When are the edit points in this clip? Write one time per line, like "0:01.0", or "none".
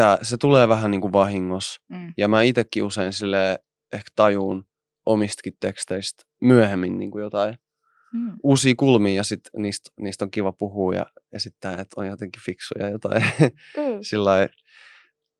none